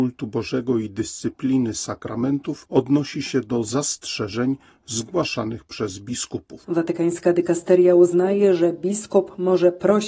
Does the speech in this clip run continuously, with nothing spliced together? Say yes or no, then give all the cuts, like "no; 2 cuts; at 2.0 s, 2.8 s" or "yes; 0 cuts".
no; 1 cut; at 6.6 s